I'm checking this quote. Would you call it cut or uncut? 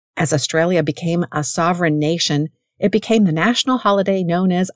uncut